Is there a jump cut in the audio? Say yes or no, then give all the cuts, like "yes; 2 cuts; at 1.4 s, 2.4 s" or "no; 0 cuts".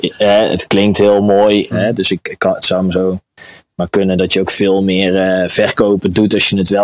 yes; 1 cut; at 1.7 s